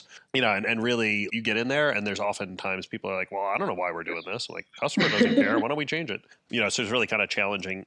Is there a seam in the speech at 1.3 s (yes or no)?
yes